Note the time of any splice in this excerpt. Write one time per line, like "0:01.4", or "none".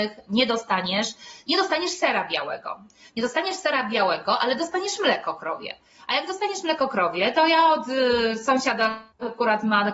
none